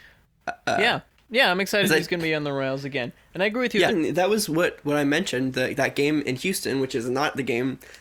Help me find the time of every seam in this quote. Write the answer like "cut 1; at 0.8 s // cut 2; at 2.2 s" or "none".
cut 1; at 3.9 s